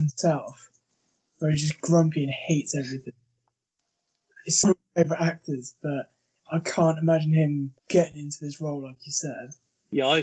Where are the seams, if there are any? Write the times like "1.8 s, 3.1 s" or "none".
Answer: 4.6 s, 7.8 s